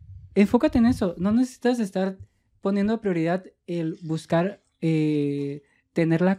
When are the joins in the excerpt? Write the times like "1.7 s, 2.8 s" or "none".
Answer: none